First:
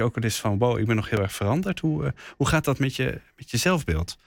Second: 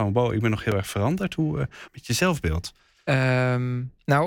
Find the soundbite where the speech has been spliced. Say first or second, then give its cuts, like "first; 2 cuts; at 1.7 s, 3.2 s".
second; 1 cut; at 1.9 s